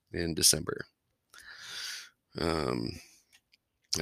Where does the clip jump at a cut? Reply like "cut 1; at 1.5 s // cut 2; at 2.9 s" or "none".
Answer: none